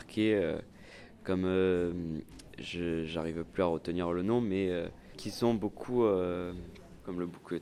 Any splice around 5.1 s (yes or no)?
no